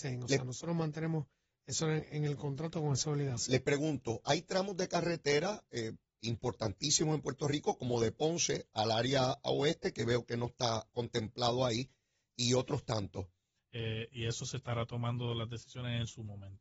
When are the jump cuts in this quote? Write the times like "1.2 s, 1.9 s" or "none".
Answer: 13.6 s